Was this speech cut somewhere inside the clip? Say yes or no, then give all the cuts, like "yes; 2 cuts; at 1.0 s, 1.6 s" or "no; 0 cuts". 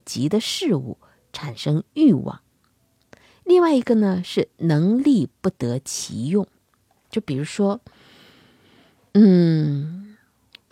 yes; 1 cut; at 7.1 s